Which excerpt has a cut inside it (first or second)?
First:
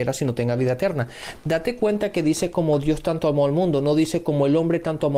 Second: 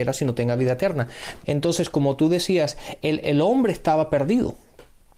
second